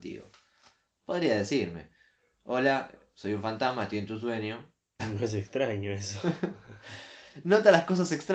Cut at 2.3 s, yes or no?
no